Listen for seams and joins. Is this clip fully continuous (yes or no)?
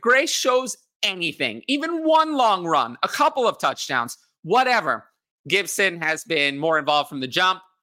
no